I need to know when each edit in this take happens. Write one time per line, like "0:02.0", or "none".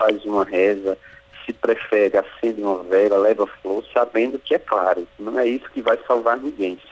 0:05.1